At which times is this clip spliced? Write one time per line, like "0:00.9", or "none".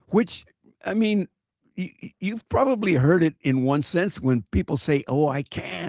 none